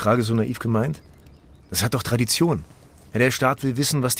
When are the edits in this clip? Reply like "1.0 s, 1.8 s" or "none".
none